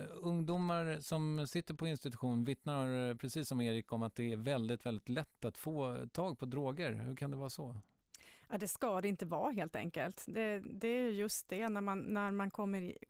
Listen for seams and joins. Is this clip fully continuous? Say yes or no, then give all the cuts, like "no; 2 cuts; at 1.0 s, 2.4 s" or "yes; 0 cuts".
yes; 0 cuts